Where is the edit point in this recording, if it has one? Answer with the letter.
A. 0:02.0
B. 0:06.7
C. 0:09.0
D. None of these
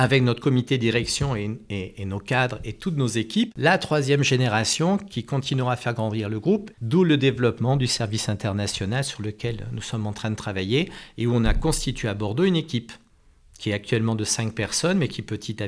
B